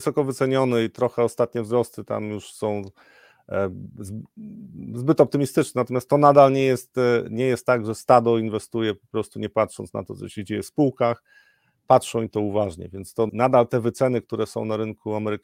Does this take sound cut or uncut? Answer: cut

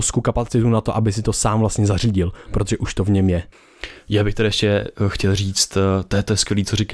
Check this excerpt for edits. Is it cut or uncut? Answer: uncut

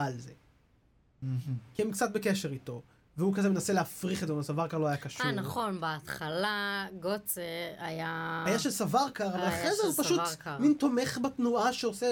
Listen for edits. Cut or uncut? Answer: uncut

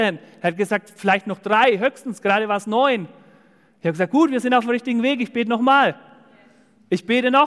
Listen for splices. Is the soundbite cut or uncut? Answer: uncut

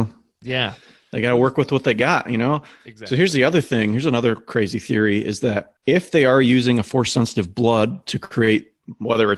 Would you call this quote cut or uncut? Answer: cut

